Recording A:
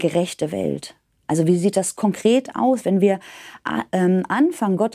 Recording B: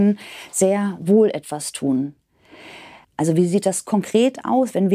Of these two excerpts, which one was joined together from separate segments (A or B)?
B